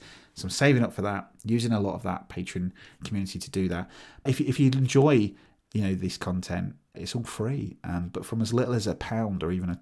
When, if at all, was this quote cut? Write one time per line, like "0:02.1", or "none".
0:04.3
0:06.9